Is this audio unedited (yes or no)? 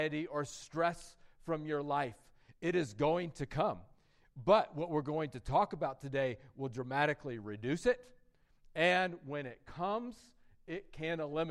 yes